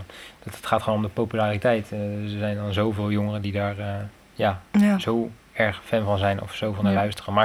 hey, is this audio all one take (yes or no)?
yes